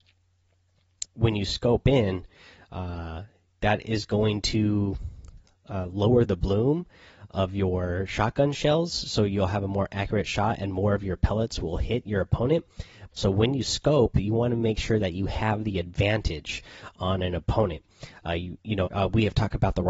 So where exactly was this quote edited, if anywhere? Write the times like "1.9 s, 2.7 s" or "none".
1.0 s, 13.1 s, 18.9 s